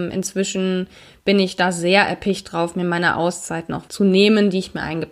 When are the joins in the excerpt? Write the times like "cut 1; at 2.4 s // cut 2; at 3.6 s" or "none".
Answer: cut 1; at 3.9 s